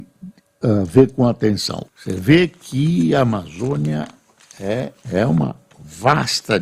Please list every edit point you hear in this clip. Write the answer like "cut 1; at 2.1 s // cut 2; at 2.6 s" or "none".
cut 1; at 1.8 s // cut 2; at 5.0 s